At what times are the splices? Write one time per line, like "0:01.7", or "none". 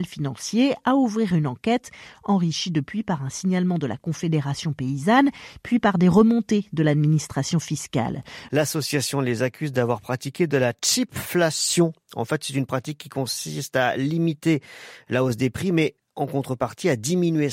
0:08.5